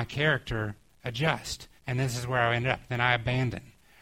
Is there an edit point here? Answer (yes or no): yes